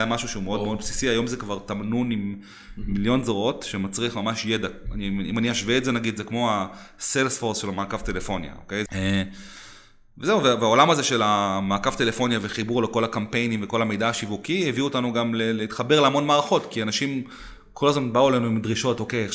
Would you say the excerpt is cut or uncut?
cut